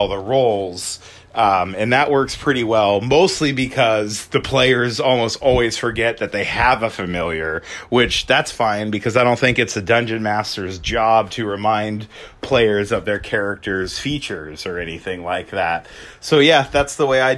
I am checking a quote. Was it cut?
no; 0 cuts

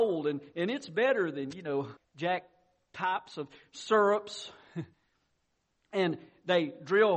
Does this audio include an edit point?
yes; 2 cuts; at 2.0 s, 4.9 s

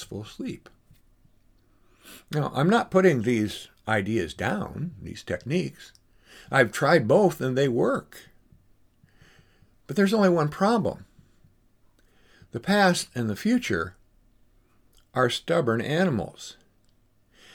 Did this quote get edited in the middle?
no; 0 cuts

